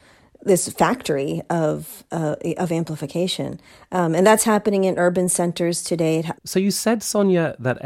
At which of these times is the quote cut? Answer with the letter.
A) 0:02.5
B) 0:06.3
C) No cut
B